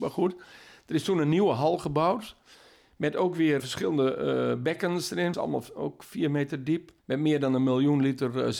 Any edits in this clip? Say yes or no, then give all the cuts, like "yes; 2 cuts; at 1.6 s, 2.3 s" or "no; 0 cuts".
yes; 3 cuts; at 3.6 s, 5.3 s, 7.0 s